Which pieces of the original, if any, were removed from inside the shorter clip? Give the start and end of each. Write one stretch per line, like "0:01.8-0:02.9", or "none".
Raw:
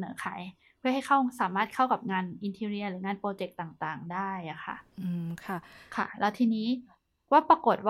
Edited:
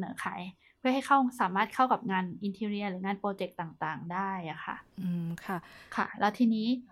none